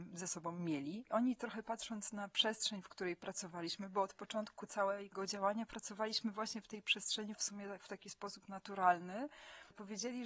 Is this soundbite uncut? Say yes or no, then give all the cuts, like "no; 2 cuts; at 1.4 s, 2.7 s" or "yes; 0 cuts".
no; 2 cuts; at 1.0 s, 7.3 s